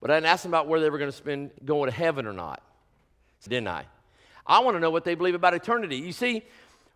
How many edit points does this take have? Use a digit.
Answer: 2